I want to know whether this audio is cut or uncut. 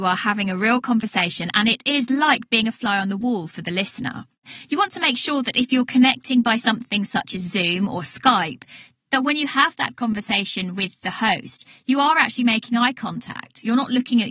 uncut